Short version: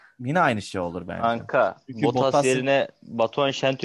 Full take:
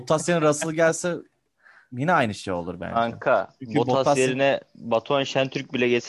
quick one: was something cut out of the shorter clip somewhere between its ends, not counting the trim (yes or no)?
no